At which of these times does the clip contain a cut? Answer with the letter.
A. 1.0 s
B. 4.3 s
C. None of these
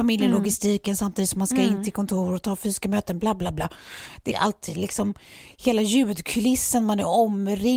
B